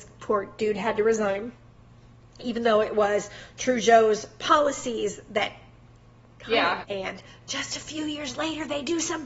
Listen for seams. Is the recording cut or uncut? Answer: cut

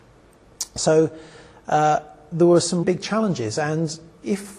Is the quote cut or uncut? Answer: cut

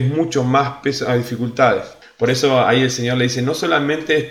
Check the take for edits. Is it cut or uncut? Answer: cut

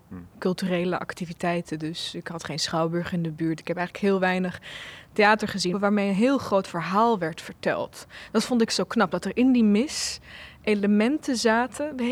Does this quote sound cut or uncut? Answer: cut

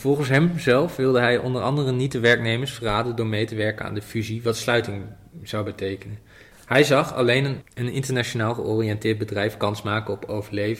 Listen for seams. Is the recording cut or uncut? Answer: uncut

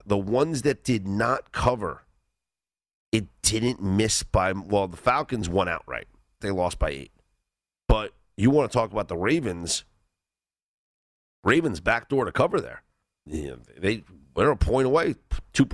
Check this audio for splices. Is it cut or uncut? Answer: cut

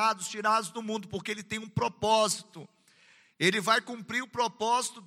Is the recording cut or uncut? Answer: uncut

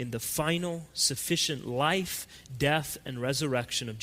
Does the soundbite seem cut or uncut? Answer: uncut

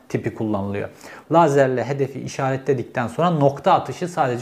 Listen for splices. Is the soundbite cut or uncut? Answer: cut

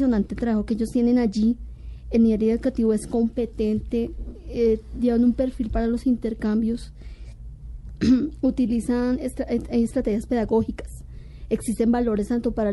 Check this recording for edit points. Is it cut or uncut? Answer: uncut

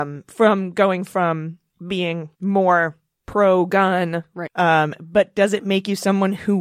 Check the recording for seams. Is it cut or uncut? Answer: cut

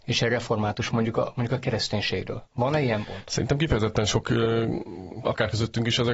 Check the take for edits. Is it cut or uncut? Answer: cut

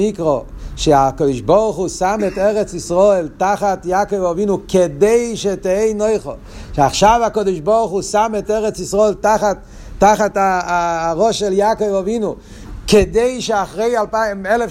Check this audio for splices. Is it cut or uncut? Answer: uncut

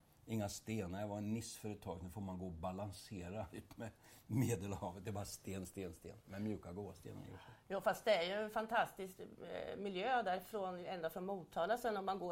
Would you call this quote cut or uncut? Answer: uncut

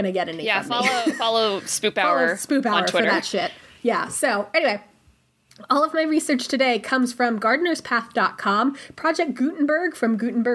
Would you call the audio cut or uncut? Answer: uncut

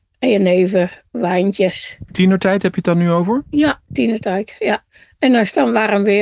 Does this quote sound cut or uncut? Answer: uncut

